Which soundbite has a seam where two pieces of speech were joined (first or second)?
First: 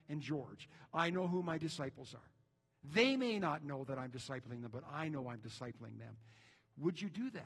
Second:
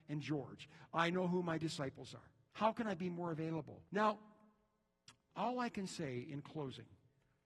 second